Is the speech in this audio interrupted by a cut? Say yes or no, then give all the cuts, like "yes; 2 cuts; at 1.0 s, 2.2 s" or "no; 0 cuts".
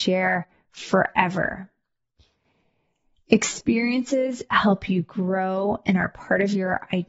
no; 0 cuts